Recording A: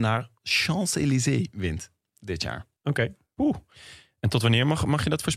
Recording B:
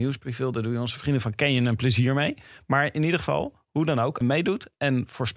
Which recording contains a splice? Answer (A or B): B